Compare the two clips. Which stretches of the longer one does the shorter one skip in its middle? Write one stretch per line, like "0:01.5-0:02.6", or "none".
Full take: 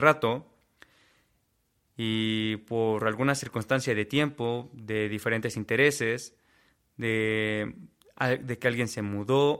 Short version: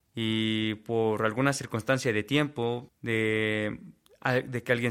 0:04.7-0:06.8